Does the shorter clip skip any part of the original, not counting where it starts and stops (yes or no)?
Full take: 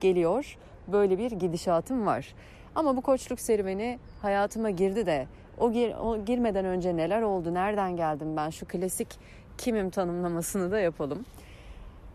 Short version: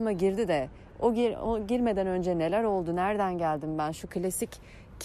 no